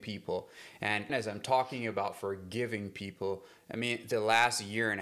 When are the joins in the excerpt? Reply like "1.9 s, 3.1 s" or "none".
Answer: 1.1 s